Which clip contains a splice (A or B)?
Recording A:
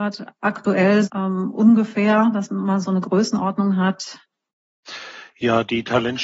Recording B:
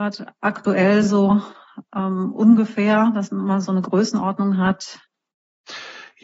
A